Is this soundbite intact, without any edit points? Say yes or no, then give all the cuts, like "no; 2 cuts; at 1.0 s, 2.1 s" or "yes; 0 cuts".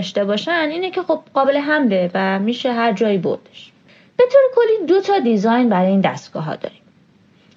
yes; 0 cuts